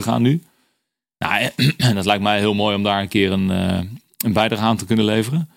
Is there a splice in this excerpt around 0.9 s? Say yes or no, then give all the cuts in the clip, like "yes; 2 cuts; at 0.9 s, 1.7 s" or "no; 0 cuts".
no; 0 cuts